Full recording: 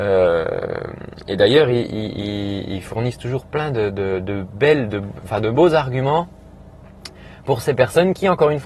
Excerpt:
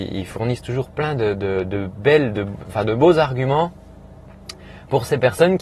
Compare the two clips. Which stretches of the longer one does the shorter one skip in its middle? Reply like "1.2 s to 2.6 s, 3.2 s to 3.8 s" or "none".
none